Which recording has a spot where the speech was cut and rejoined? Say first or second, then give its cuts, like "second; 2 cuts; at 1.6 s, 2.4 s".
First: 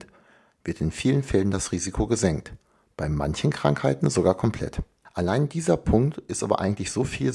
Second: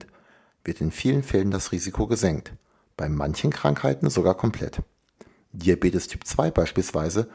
first; 1 cut; at 5.0 s